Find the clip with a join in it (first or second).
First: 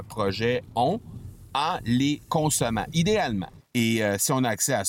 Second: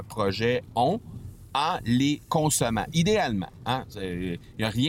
first